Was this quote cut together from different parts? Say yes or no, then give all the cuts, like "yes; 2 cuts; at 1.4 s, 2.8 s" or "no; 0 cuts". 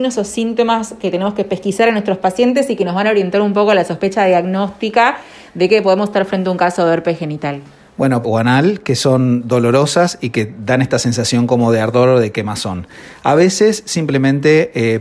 yes; 1 cut; at 8.2 s